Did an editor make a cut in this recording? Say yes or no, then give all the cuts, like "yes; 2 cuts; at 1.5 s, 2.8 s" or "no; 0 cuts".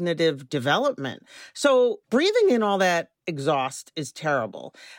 no; 0 cuts